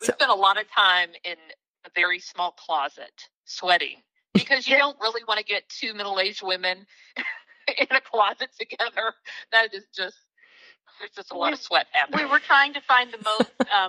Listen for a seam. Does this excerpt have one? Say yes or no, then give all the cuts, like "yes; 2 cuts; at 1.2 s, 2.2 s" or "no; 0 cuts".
no; 0 cuts